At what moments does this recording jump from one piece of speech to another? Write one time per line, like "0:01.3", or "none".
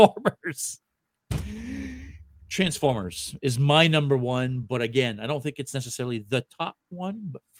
none

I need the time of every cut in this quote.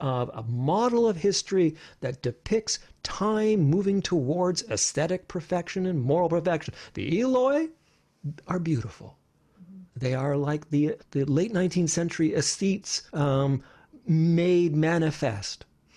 0:11.0
0:13.1

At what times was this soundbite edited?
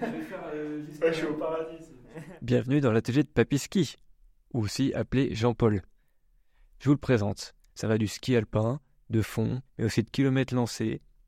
0:07.7
0:09.7

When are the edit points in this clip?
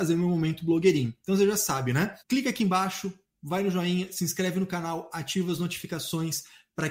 0:02.2

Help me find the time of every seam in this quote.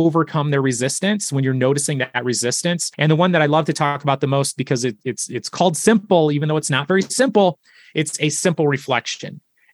0:02.9

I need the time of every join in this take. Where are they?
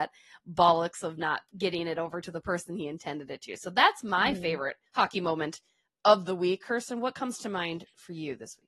0:04.9

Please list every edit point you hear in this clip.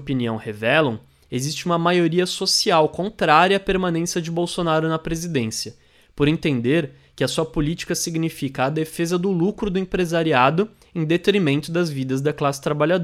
none

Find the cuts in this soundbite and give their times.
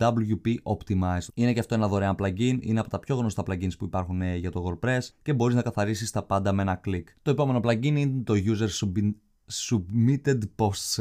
0:01.3
0:07.1

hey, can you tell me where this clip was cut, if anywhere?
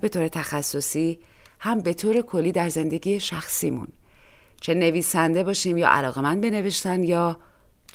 none

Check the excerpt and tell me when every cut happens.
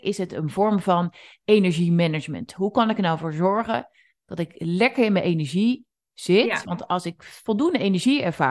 none

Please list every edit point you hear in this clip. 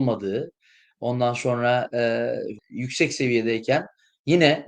0:02.6

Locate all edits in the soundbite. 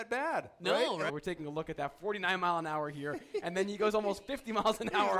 0:01.1

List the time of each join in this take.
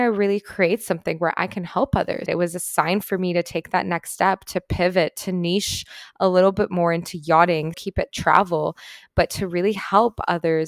0:02.3
0:07.7

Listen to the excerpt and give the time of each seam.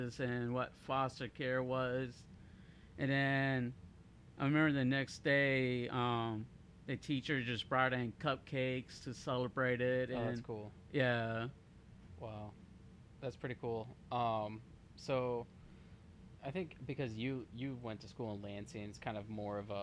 none

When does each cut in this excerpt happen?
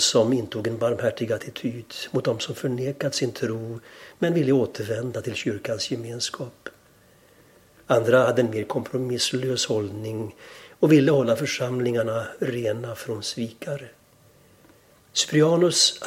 0:15.0

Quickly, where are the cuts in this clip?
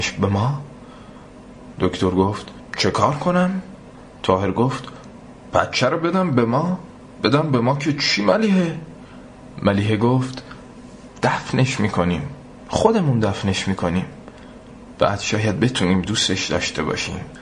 none

